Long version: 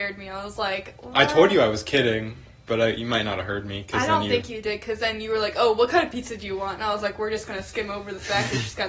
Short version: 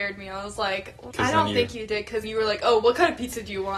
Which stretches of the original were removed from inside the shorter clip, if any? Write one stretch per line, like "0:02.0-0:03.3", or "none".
0:01.1-0:03.9
0:05.0-0:05.2